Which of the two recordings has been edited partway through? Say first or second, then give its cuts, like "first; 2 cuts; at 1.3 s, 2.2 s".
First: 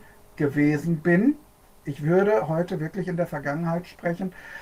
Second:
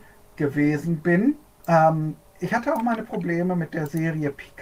second; 1 cut; at 1.6 s